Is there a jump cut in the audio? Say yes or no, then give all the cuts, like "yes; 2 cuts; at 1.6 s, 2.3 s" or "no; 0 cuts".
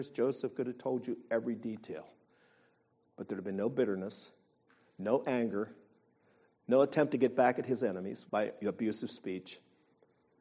yes; 2 cuts; at 6.5 s, 8.3 s